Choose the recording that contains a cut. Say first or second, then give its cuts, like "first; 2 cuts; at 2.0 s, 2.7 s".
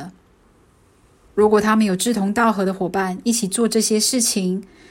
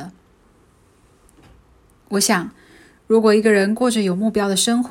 first; 1 cut; at 1.3 s